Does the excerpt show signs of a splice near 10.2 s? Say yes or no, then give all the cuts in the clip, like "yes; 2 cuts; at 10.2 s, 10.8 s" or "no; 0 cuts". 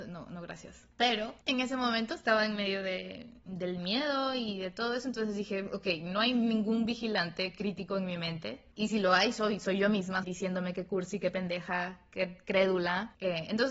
yes; 1 cut; at 10.2 s